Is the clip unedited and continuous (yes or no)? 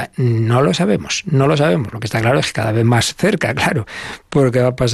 yes